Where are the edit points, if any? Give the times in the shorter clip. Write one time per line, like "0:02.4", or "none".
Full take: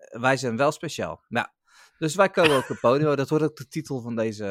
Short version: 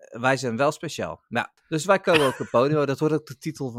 0:01.6

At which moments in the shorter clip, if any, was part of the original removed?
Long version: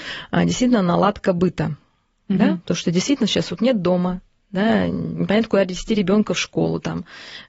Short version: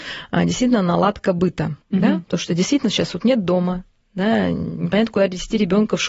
0:01.8

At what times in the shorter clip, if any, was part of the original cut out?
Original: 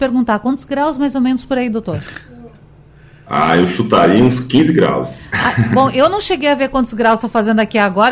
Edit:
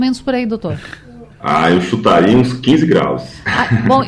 0:01.3

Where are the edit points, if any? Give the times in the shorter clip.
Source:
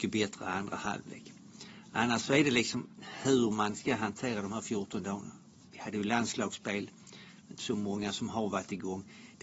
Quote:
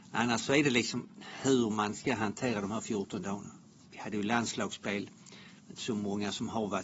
none

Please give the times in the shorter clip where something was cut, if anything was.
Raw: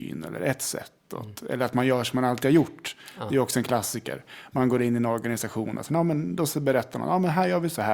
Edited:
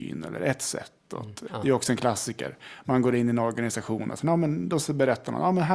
0:01.5

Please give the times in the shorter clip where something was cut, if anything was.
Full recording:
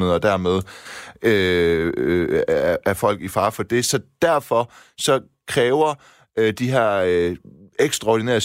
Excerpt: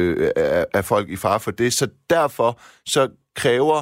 none

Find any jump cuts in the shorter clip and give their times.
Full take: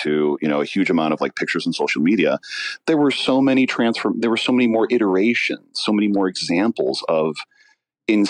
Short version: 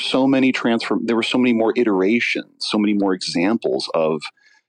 none

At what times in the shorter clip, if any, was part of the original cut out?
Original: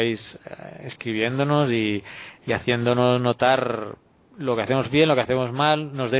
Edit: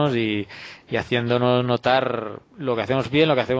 0:02.5

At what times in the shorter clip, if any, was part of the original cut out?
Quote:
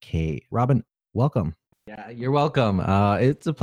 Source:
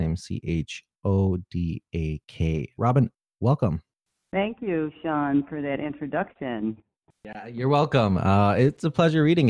0:01.7

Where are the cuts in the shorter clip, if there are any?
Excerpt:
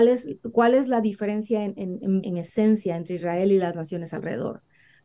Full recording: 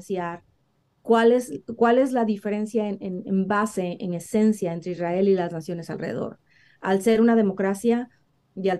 0:02.2

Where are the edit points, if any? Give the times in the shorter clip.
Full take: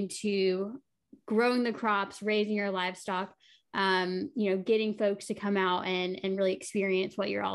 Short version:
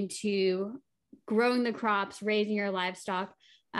none

